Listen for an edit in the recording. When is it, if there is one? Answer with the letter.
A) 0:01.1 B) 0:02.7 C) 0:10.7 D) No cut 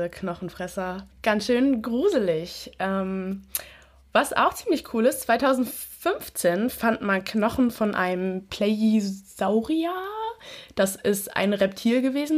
A